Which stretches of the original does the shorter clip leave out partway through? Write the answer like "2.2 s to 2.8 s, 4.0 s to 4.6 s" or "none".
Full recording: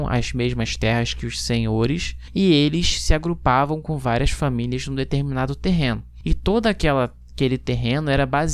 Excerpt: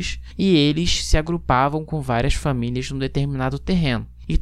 none